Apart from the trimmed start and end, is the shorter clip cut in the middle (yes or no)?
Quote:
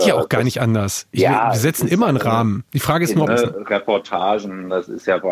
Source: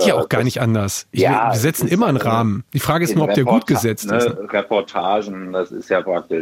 yes